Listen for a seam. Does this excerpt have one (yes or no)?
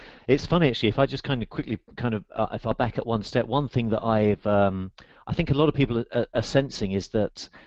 no